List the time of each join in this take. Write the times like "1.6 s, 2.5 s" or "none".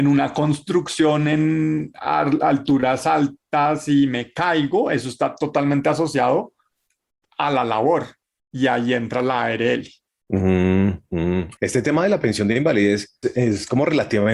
11.6 s, 13.2 s